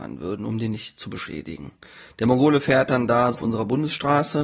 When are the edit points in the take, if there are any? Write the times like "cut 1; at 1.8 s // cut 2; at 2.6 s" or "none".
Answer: cut 1; at 3.3 s